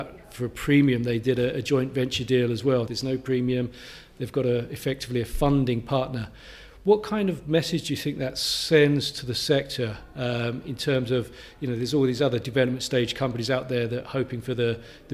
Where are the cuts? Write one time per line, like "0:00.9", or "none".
0:02.9